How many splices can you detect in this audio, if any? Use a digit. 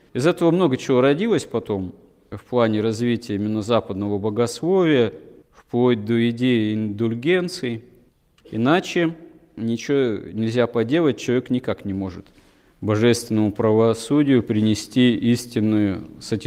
1